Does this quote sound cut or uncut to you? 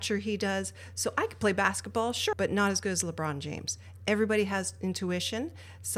cut